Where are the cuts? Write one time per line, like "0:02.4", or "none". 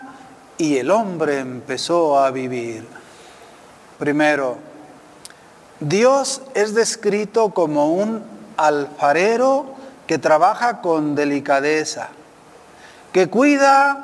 0:03.9